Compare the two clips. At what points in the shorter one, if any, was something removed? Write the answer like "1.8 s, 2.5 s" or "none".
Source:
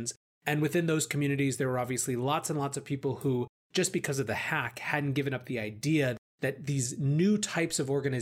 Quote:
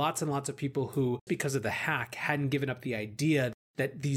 1.3 s